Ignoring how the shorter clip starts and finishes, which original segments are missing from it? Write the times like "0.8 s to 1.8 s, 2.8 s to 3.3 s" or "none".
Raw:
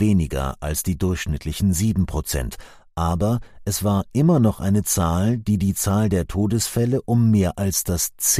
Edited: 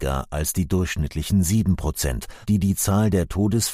2.7 s to 5.4 s